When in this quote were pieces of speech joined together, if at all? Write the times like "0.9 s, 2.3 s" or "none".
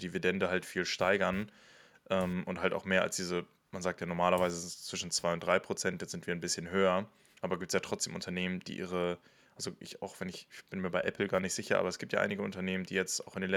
none